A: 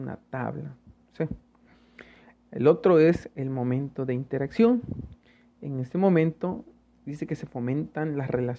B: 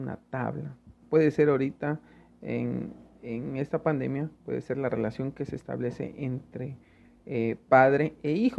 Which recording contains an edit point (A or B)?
B